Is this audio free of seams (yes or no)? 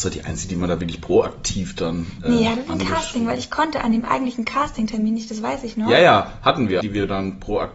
no